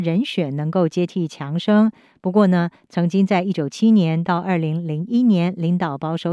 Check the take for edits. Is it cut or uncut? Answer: cut